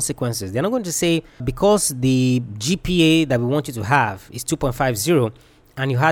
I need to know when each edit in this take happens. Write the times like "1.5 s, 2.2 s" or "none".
1.4 s